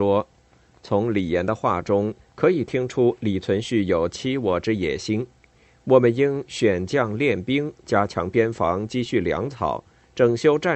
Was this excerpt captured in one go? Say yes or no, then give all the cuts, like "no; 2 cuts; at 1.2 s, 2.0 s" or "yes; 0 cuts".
yes; 0 cuts